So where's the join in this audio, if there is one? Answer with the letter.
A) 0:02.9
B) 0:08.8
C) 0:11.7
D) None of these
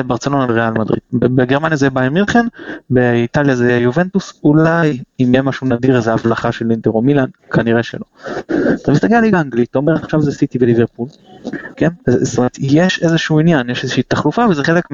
C